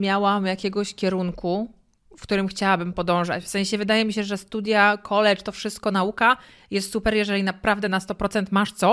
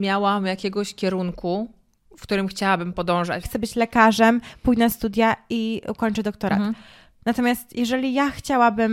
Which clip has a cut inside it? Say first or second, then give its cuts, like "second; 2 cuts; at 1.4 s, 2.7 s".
second; 1 cut; at 3.4 s